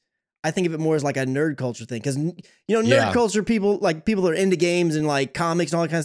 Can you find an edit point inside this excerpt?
no; 0 cuts

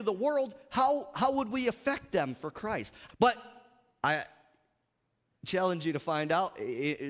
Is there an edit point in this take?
yes; 1 cut; at 3.1 s

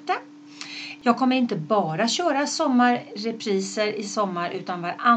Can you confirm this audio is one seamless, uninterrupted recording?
no; 1 cut; at 1.0 s

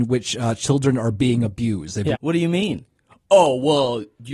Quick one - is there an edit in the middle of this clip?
yes; 1 cut; at 2.1 s

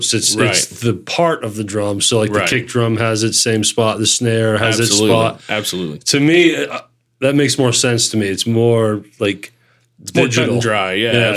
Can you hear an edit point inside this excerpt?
no; 0 cuts

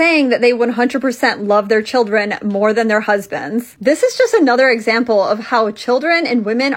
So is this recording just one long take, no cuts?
yes; 0 cuts

